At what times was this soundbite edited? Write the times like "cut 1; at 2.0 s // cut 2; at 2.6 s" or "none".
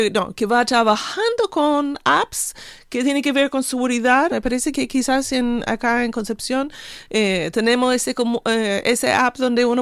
cut 1; at 4.3 s

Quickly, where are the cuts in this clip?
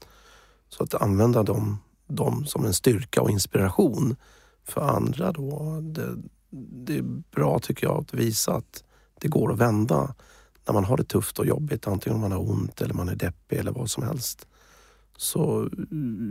none

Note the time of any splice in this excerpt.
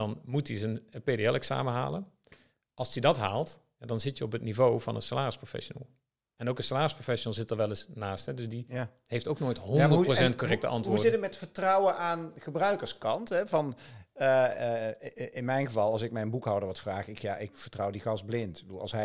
none

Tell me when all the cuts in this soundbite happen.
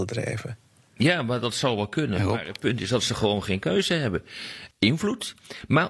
cut 1; at 4.7 s

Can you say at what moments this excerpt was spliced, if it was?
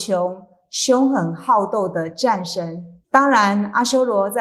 cut 1; at 3.0 s

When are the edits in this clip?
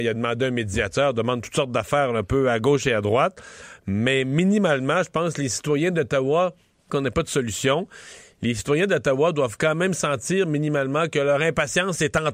cut 1; at 6.9 s

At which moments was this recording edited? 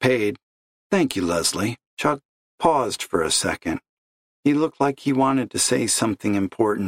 cut 1; at 1.9 s

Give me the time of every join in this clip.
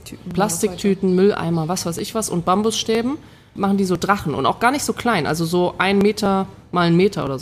cut 1; at 3.6 s

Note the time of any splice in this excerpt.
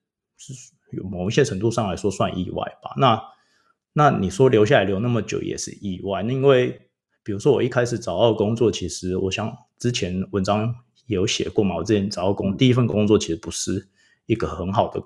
none

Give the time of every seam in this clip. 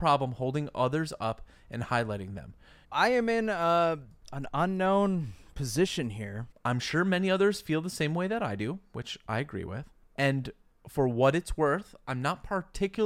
cut 1; at 2.8 s // cut 2; at 6.5 s

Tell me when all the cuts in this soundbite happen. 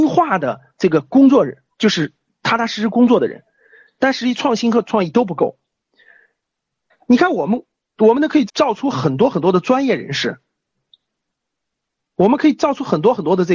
cut 1; at 6.9 s // cut 2; at 8.5 s

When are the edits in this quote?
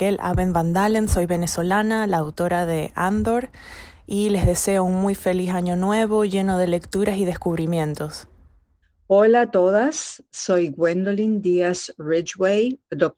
none

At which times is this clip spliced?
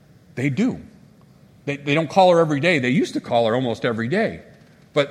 none

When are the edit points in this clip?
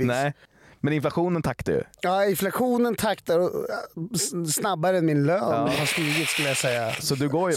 none

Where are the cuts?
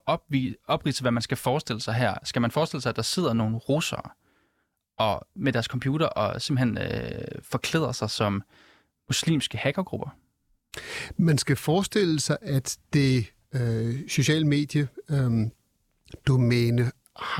none

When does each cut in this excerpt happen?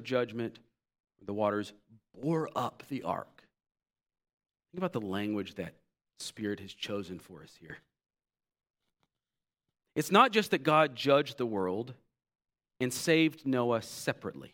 none

